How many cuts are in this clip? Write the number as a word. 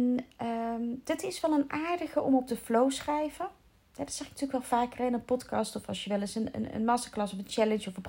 zero